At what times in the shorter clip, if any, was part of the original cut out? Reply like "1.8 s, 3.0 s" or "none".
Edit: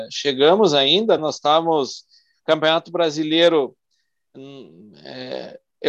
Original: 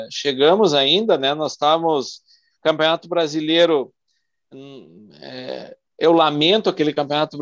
1.2 s